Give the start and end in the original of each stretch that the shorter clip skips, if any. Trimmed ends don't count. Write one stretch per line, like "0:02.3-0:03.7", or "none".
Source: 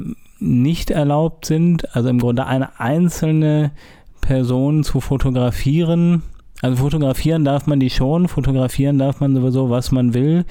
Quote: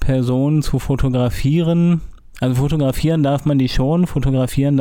none